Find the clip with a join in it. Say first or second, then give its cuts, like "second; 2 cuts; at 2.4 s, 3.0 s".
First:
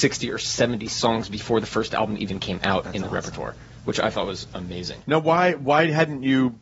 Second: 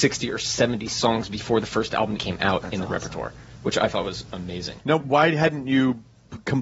second; 2 cuts; at 2.2 s, 5.0 s